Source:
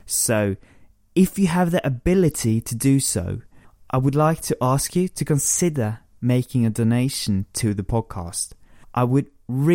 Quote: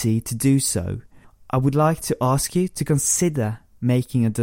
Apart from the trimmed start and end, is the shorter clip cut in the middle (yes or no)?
no